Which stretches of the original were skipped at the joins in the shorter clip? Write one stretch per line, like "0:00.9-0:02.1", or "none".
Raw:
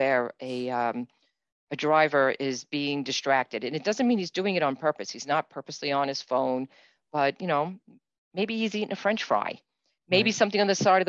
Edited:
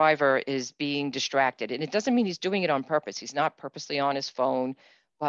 none